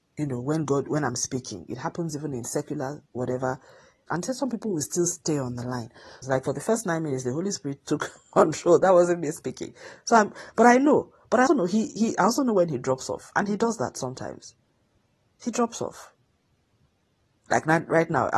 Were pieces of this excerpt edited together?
yes; 3 cuts; at 4.1 s, 6.2 s, 11.5 s

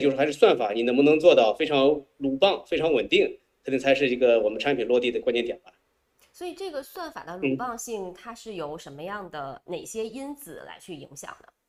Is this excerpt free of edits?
yes; 0 cuts

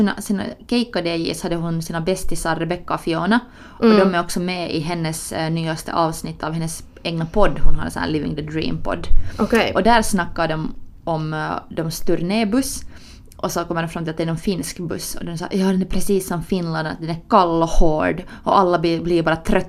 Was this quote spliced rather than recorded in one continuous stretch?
no; 0 cuts

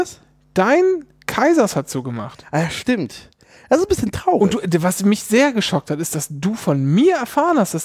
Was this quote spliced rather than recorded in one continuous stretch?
no; 0 cuts

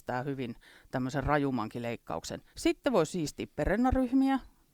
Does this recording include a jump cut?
yes; 1 cut; at 2.5 s

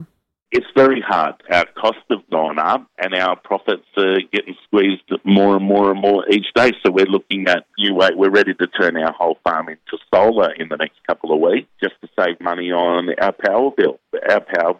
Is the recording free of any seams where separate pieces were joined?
yes; 0 cuts

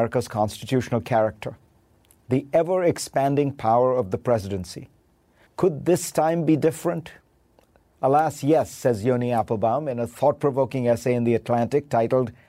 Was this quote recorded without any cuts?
no; 1 cut; at 5.5 s

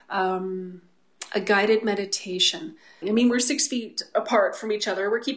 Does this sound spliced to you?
yes; 1 cut; at 3.0 s

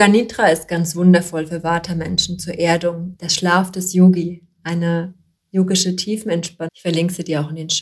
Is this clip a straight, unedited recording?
no; 2 cuts; at 3.2 s, 6.7 s

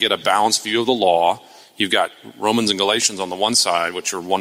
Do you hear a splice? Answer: no; 0 cuts

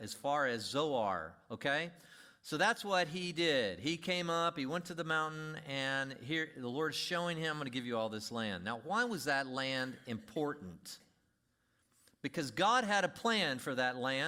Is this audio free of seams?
yes; 0 cuts

